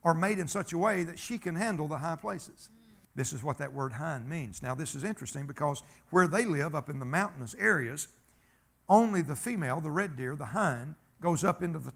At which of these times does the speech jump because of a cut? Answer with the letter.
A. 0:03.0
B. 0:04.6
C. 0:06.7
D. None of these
A